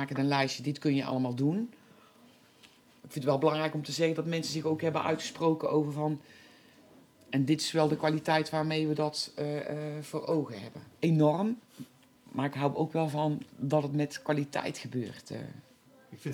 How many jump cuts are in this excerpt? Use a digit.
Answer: 1